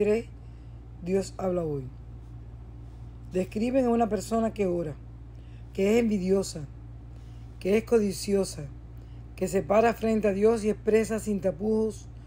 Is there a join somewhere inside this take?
yes; 2 cuts; at 3.3 s, 5.7 s

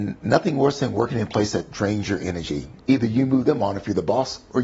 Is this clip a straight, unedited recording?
no; 1 cut; at 2.8 s

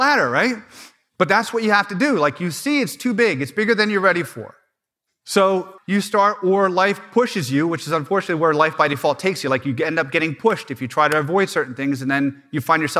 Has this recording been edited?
yes; 1 cut; at 5.8 s

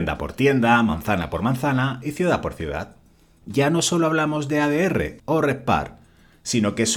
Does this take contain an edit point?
yes; 2 cuts; at 3.4 s, 5.2 s

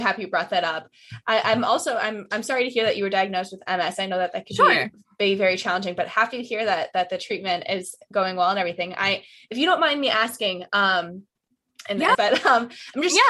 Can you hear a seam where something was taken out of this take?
yes; 1 cut; at 12.1 s

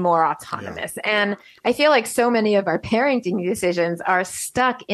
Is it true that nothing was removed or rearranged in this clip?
yes; 0 cuts

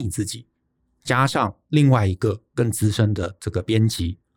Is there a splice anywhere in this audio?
no; 0 cuts

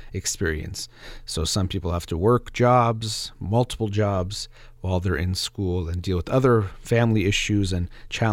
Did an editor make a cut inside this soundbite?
no; 0 cuts

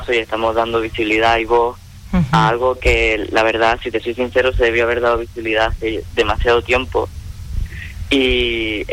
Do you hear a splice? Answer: no; 0 cuts

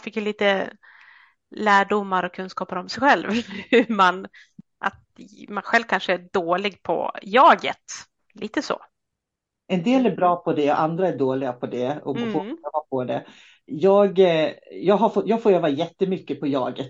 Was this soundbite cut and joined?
yes; 1 cut; at 8.2 s

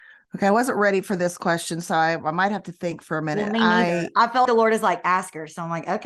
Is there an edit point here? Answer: yes; 1 cut; at 4.5 s

